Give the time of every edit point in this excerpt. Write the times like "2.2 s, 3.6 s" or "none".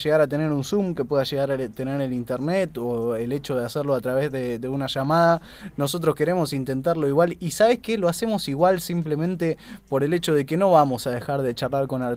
none